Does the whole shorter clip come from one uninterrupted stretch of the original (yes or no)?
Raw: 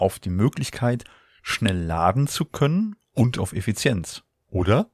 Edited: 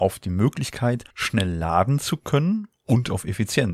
no